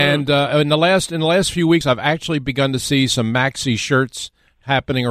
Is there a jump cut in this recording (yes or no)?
no